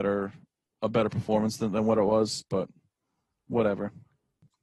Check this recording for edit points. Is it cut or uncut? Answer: uncut